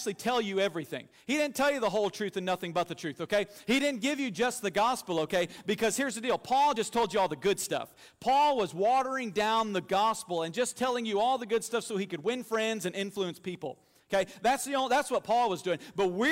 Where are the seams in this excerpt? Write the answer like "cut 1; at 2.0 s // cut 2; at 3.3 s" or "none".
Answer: none